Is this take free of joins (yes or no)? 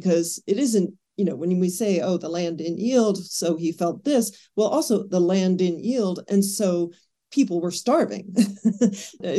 yes